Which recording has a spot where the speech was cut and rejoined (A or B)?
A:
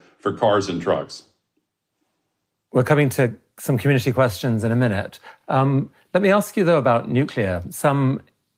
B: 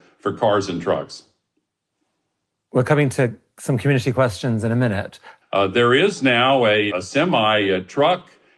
B